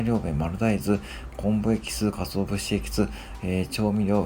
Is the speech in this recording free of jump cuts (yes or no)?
yes